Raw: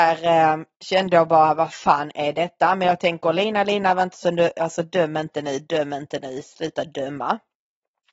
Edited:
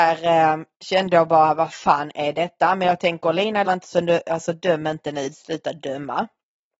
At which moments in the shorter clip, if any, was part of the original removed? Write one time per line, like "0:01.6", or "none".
0:03.6
0:05.3